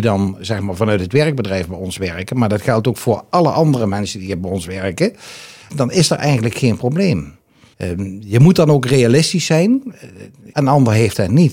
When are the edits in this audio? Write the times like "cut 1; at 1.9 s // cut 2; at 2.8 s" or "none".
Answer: cut 1; at 5.7 s // cut 2; at 7.7 s // cut 3; at 10.5 s